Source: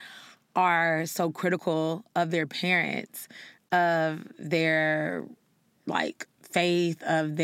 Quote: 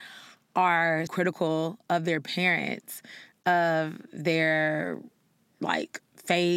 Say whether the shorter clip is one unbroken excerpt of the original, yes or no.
no